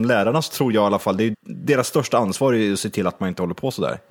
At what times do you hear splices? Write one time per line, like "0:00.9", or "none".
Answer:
0:01.3